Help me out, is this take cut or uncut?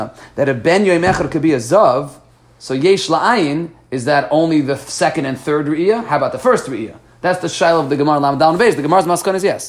uncut